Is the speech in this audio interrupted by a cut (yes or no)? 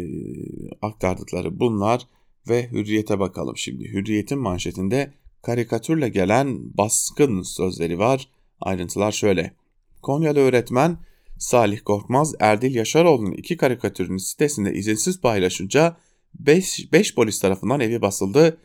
no